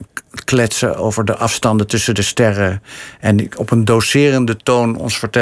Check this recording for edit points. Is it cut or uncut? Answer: uncut